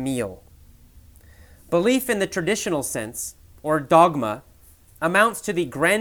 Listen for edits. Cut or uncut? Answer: cut